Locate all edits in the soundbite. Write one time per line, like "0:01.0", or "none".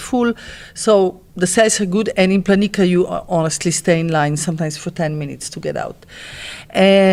0:01.3